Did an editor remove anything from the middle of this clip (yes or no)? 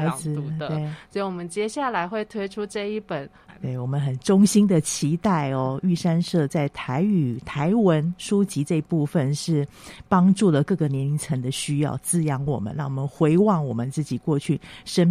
yes